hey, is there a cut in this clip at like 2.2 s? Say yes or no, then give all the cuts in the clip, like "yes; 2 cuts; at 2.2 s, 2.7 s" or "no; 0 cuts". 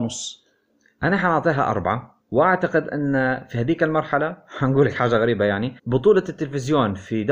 yes; 2 cuts; at 2.2 s, 5.8 s